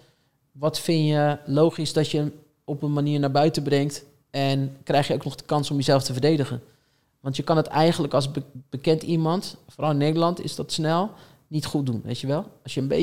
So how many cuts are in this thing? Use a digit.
0